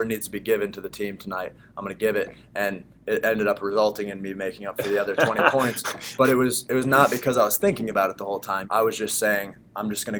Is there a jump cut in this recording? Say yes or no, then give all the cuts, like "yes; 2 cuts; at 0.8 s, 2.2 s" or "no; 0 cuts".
yes; 1 cut; at 8.6 s